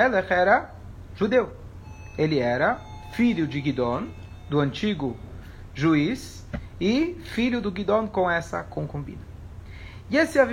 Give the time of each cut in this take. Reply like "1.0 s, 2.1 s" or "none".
none